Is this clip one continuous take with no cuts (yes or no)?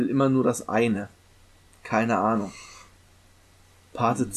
yes